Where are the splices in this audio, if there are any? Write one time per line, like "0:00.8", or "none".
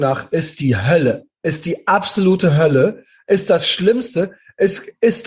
none